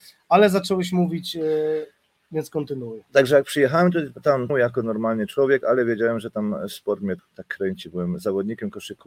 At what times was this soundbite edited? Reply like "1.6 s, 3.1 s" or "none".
4.5 s, 7.2 s